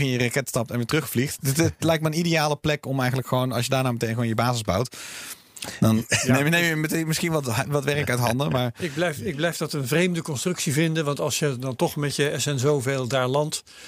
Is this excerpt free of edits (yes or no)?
yes